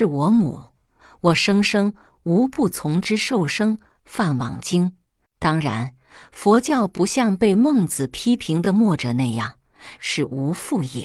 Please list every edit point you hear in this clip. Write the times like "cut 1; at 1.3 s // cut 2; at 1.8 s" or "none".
cut 1; at 5.2 s // cut 2; at 10.0 s